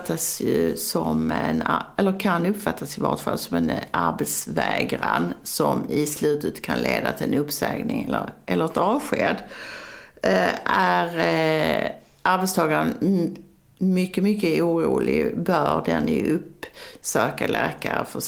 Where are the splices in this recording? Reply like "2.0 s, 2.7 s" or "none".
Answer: none